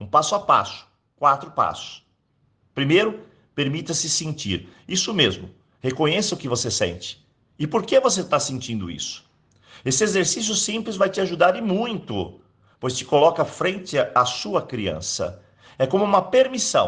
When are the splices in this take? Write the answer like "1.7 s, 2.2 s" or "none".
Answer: none